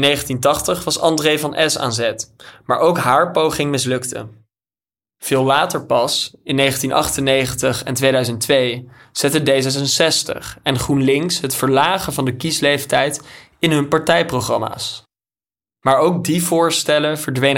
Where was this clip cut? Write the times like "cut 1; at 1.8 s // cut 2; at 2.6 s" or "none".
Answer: none